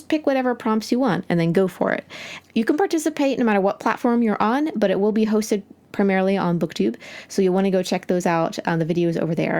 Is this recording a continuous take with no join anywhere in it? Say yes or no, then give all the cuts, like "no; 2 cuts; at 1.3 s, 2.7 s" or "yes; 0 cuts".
no; 1 cut; at 2.4 s